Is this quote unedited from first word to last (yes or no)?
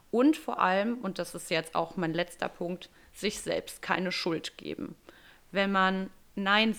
yes